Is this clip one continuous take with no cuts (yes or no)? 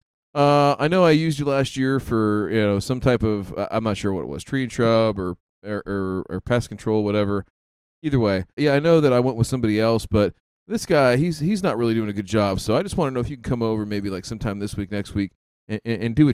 no